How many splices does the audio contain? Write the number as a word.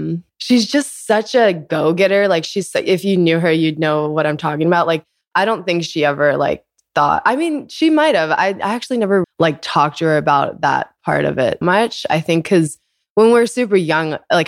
two